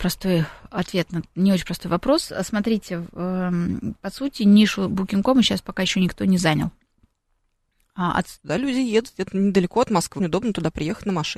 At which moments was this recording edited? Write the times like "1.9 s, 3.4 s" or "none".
8.4 s, 10.2 s